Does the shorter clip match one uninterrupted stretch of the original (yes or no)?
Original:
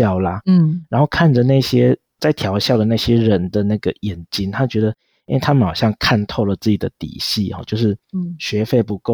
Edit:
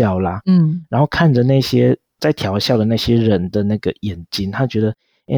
yes